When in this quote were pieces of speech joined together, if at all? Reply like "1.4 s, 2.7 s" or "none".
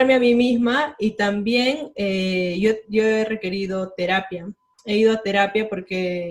none